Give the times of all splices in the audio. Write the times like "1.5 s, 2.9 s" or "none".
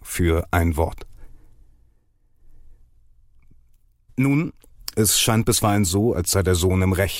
none

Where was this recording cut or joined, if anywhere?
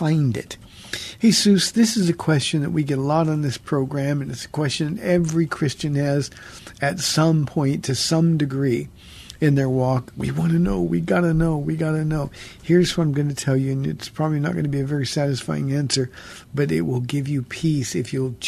none

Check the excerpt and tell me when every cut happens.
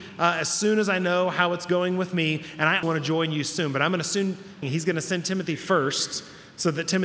2.8 s, 4.6 s

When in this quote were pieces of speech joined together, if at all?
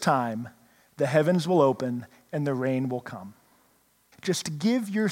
4.1 s

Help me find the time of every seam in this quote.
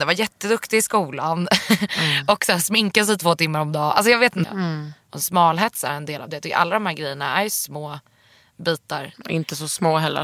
4.4 s

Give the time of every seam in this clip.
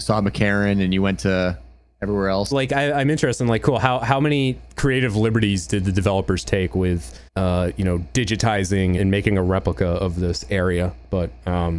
2.5 s, 7.3 s, 9.0 s

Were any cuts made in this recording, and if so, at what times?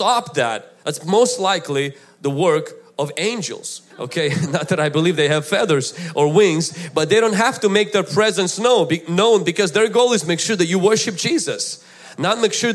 3.9 s

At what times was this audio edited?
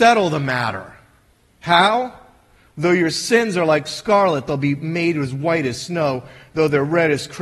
none

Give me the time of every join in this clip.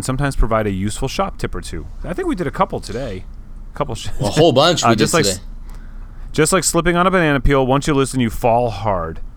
none

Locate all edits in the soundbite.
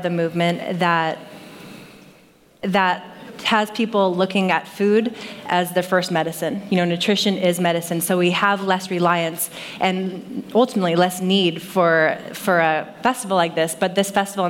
none

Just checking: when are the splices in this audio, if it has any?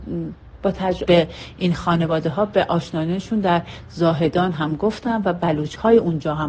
1.1 s

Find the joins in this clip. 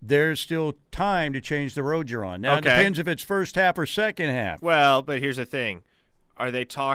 none

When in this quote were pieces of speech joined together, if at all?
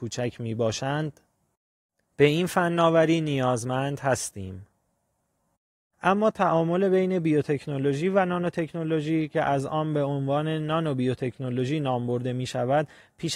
5.9 s

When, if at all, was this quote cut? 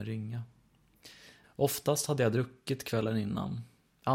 1.4 s

